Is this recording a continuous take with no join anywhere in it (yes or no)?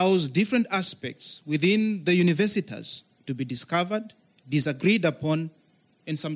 yes